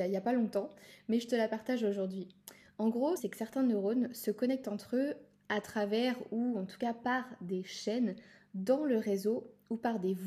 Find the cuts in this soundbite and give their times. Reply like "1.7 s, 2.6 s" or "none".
3.2 s